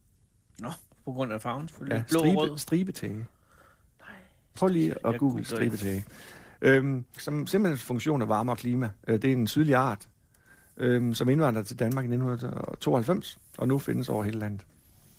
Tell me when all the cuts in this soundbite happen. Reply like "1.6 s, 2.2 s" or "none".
7.2 s